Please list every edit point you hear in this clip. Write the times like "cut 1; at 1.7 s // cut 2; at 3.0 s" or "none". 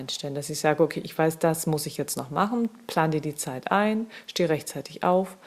none